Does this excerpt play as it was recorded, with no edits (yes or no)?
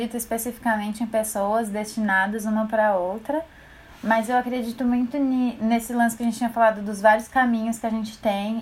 yes